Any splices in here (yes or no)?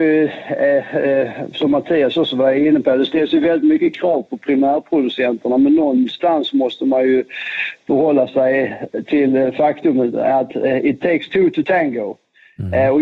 no